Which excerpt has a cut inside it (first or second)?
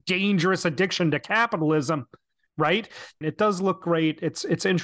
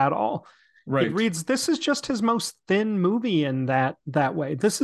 first